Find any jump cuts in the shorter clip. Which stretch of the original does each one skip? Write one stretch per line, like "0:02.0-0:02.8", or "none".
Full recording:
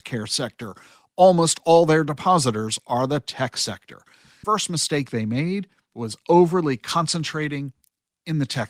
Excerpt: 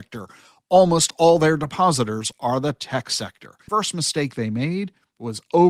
0:04.1-0:04.4